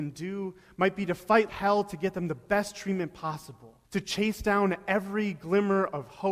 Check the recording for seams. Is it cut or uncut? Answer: cut